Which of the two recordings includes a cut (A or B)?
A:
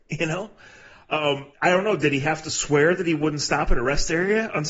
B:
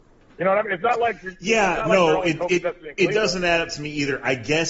A